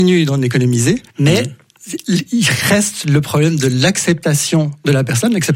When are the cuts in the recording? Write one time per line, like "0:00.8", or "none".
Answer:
0:01.1